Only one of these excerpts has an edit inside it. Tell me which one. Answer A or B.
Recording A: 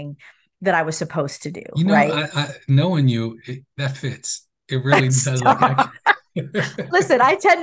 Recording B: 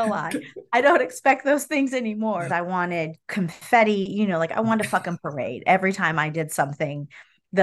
B